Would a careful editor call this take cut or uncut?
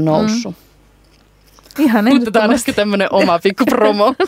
cut